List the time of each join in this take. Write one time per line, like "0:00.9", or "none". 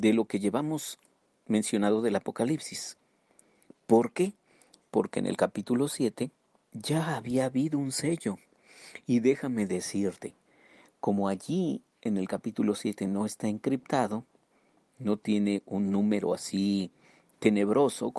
none